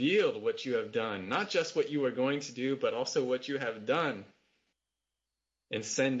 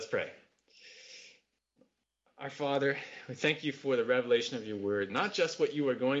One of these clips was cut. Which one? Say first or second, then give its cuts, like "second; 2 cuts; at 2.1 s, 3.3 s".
second; 1 cut; at 5.1 s